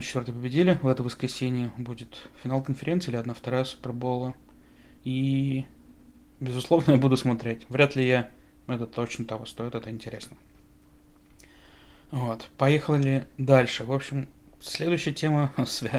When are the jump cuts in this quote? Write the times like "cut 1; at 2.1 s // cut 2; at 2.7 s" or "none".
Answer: cut 1; at 8.5 s